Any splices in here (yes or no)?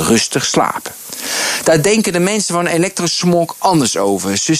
no